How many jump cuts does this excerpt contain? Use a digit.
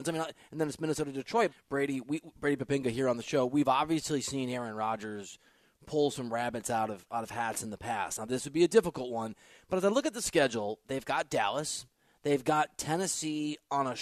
1